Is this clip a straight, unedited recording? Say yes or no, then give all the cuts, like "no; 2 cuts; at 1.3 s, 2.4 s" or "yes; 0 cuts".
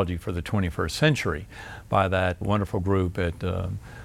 no; 1 cut; at 2.4 s